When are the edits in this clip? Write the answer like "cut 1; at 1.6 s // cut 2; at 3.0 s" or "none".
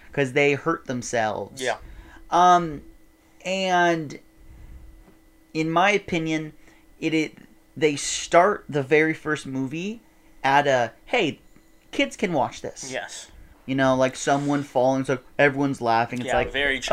cut 1; at 13.5 s